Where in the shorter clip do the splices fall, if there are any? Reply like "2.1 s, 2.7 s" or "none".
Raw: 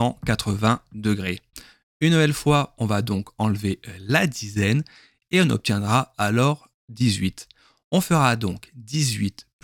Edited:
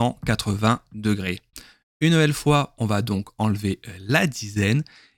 none